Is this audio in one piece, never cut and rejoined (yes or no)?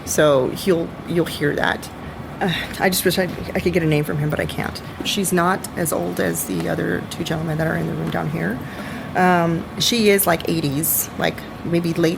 no